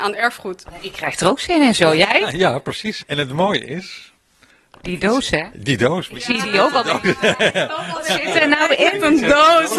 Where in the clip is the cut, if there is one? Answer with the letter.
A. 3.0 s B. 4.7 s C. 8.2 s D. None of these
A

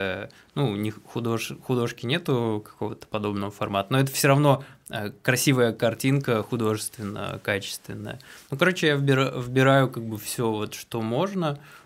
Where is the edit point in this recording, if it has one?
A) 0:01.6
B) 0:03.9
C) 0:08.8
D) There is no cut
D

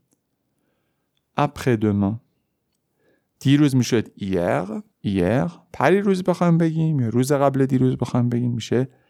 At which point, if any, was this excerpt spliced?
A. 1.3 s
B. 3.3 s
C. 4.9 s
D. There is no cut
C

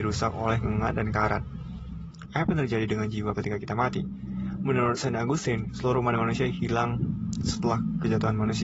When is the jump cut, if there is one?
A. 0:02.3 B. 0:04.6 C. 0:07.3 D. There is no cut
A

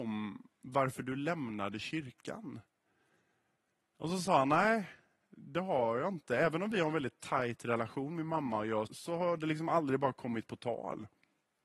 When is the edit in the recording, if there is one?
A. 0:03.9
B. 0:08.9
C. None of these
B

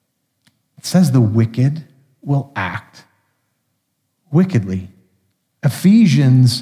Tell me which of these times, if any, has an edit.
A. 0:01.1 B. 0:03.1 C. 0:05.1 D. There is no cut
D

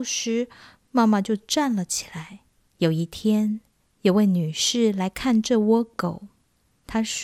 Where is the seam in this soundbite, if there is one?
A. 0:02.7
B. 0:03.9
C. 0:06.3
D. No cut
A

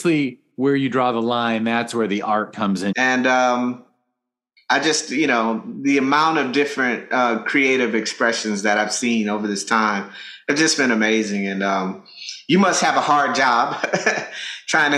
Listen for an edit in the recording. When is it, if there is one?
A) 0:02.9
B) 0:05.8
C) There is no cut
A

